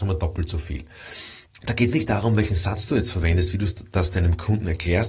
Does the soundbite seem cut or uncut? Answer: uncut